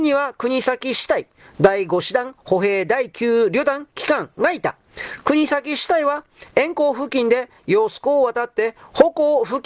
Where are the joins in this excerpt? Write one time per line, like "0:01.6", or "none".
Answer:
none